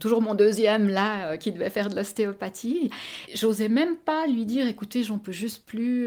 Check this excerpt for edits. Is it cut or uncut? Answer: cut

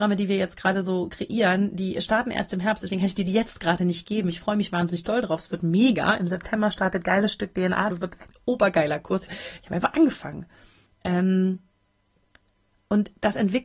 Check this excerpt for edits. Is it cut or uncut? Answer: cut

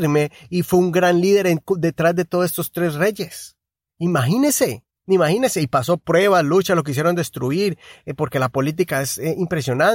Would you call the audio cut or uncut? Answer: uncut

